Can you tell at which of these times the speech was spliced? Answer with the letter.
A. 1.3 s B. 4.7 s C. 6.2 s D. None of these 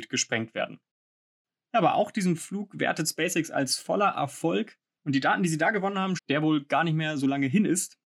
C